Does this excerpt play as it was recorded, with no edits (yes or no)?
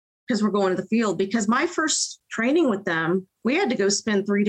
no